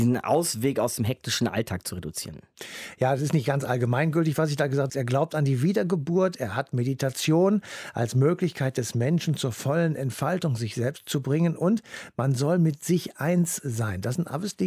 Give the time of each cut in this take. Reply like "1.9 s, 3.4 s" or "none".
4.9 s